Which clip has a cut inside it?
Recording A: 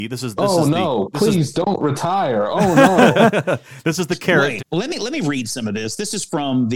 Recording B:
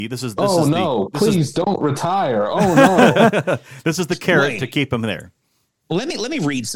A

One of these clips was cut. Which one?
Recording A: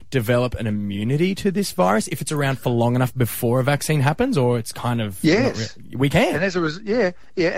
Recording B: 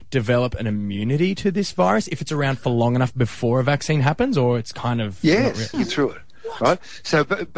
B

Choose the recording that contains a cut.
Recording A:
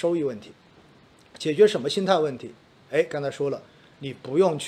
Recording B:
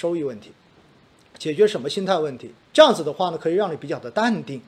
B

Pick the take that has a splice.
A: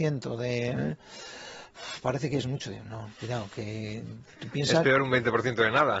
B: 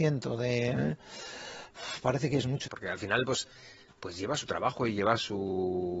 B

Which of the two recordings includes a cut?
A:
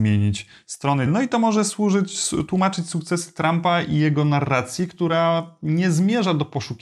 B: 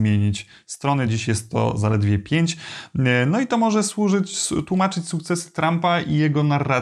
A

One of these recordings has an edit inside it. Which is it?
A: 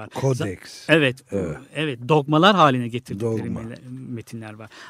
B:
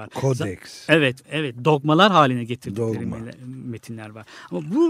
B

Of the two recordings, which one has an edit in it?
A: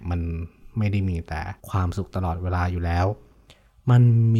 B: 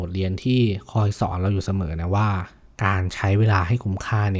A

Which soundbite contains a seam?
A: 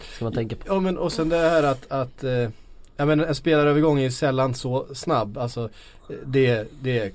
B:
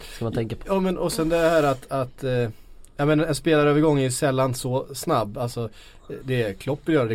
B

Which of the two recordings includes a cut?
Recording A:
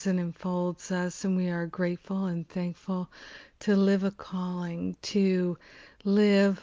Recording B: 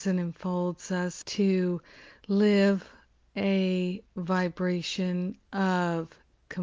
B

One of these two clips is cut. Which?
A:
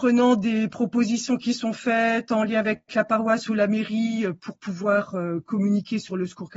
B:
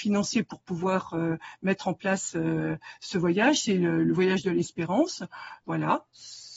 B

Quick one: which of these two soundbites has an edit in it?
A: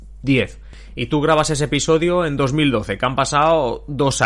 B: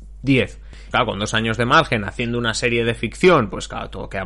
B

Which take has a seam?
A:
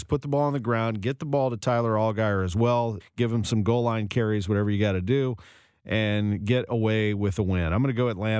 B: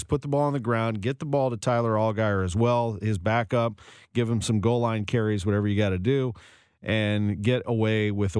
A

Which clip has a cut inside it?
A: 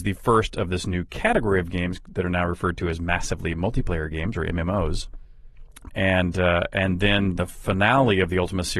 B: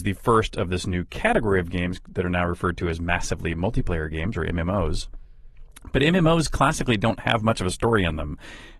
A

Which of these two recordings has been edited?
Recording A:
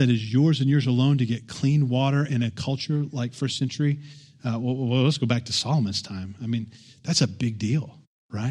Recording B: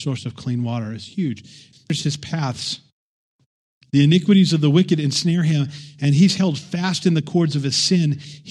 B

